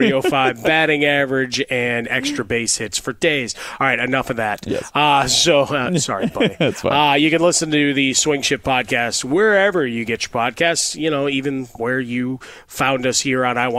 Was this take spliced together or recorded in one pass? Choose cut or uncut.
uncut